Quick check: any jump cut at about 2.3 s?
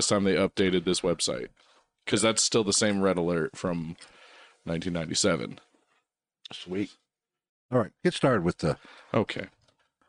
no; 0 cuts

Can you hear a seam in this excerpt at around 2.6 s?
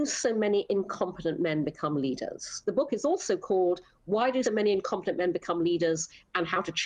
yes; 2 cuts; at 2.6 s, 4.4 s

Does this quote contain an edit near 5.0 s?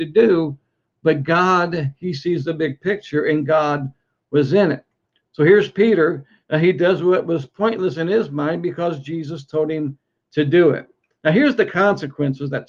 no; 0 cuts

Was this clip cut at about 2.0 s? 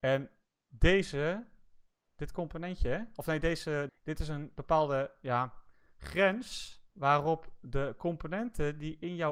no; 2 cuts; at 3.9 s, 6.9 s

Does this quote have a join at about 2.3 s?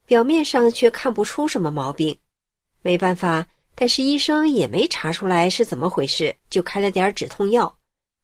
no; 2 cuts; at 3.6 s, 6.4 s

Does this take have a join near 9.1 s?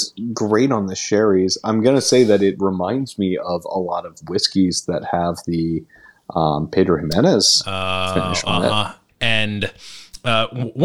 yes; 1 cut; at 9.1 s

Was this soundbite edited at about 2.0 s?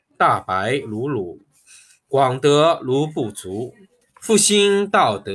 no; 1 cut; at 4.0 s

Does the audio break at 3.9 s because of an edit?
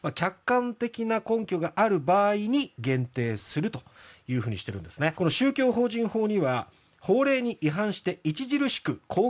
no; 1 cut; at 5.1 s

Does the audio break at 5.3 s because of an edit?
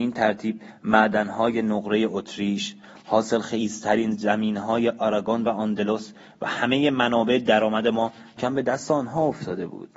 no; 1 cut; at 8.4 s

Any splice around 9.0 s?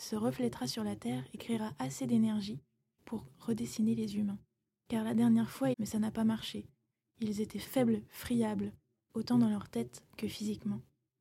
yes; 2 cuts; at 5.7 s, 9.0 s

